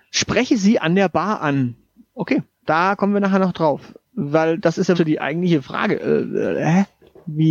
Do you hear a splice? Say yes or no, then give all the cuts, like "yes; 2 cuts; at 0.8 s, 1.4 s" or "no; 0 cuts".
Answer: yes; 1 cut; at 4.9 s